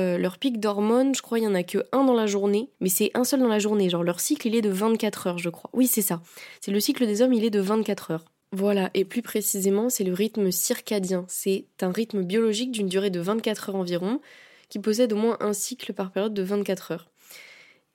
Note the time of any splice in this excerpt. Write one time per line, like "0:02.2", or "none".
0:02.7